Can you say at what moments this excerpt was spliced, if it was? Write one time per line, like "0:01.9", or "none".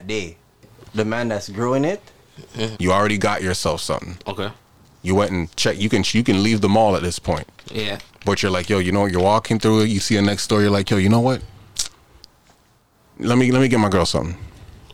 0:02.7

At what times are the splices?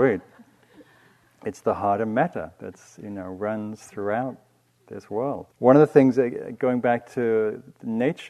0:05.5

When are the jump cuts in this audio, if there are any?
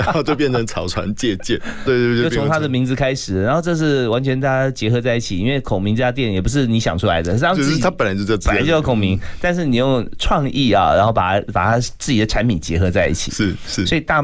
0:01.9

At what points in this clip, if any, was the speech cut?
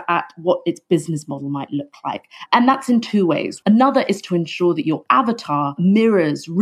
0:02.5
0:03.6

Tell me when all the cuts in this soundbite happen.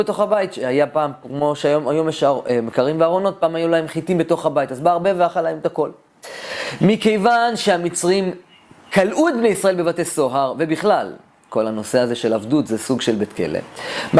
none

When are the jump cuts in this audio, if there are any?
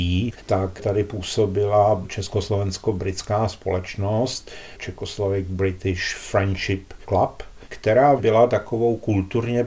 none

